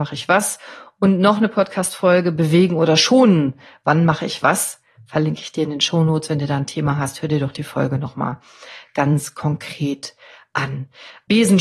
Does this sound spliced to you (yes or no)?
no